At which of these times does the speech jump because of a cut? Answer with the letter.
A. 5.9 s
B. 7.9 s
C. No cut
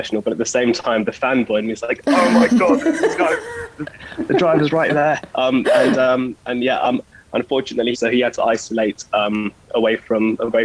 B